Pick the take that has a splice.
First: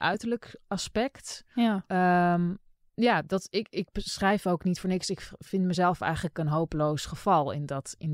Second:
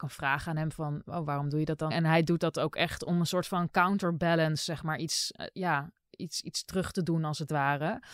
second; 1 cut; at 1.9 s

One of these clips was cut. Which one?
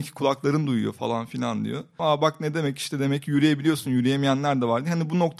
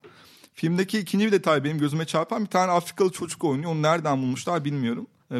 first; 1 cut; at 2.0 s

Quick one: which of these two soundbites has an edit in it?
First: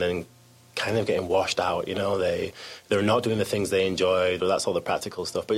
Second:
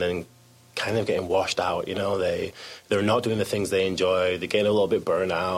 first; 1 cut; at 4.4 s

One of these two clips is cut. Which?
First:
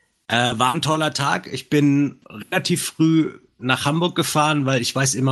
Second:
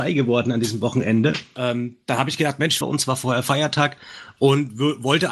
second; 2 cuts; at 1.6 s, 2.8 s

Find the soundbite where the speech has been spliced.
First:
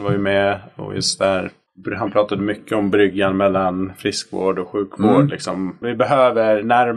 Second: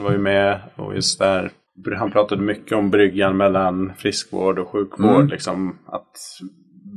first; 1 cut; at 5.8 s

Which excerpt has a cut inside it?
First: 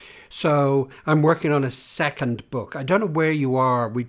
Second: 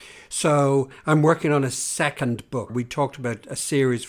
second; 1 cut; at 2.7 s

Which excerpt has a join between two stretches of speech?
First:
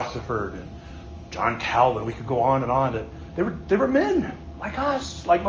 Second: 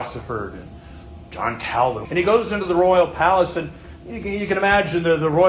second; 1 cut; at 2.0 s

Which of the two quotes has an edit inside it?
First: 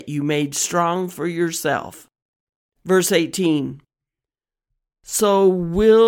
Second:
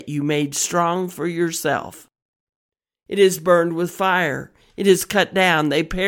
first; 1 cut; at 2.8 s

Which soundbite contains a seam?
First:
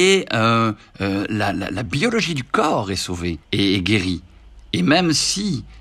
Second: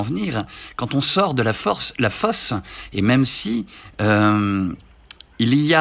first; 1 cut; at 3.4 s

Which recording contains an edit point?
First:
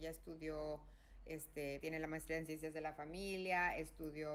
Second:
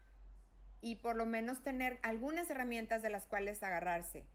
first; 1 cut; at 1.8 s

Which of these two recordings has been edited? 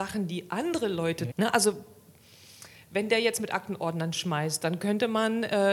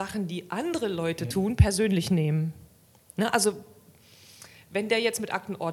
first; 1 cut; at 1.3 s

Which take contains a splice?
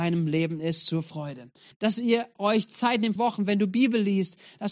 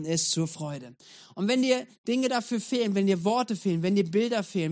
first; 2 cuts; at 1.7 s, 3.2 s

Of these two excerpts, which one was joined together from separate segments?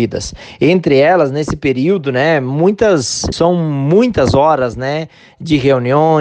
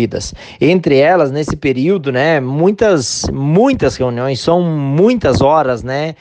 first; 1 cut; at 3.3 s

